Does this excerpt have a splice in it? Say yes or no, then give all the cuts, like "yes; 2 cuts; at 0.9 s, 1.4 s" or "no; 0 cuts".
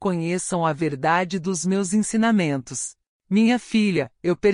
yes; 1 cut; at 3.1 s